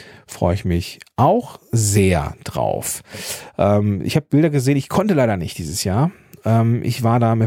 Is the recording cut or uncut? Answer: uncut